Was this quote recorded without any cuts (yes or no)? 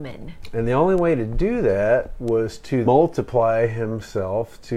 no